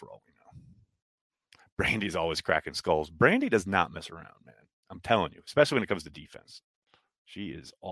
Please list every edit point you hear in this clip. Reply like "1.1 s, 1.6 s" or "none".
none